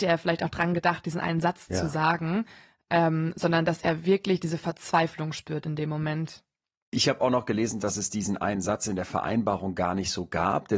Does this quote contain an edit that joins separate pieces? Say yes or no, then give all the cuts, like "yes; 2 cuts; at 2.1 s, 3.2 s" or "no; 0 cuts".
no; 0 cuts